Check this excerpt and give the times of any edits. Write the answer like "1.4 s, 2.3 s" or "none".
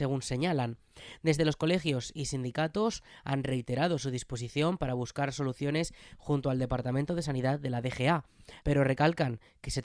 8.6 s

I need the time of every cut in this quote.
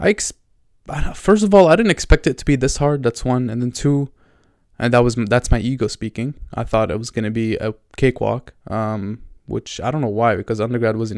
none

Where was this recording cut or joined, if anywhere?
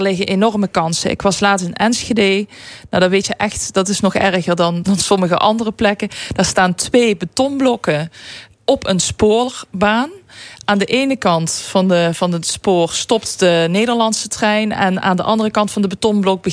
4.8 s

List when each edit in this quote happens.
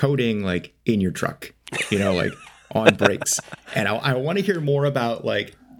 none

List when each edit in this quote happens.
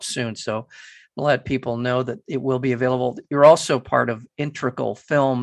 none

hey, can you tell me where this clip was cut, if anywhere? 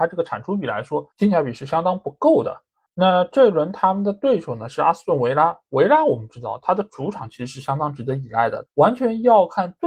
8.7 s

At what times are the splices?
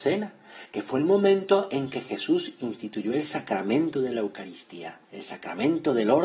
5.0 s

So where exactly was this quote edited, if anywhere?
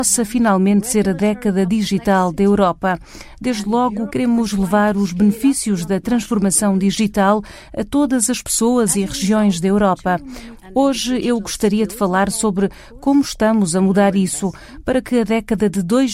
4.1 s, 10.5 s

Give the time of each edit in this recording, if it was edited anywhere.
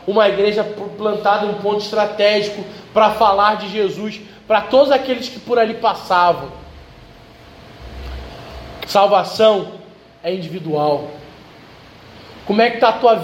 8.8 s

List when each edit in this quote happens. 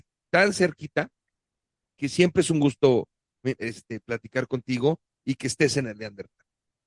3.6 s

